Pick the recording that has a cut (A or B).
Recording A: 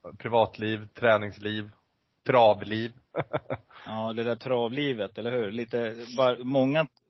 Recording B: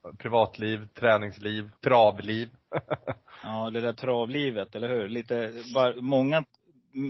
B